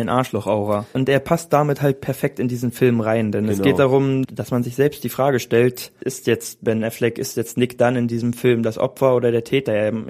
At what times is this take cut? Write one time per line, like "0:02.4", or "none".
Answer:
0:00.9